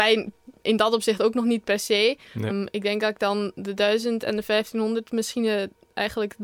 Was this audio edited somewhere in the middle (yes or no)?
yes